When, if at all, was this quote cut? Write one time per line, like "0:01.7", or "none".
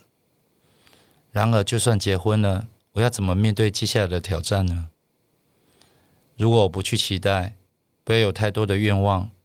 none